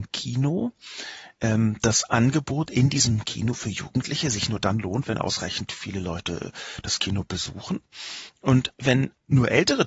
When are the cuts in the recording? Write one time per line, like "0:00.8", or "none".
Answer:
none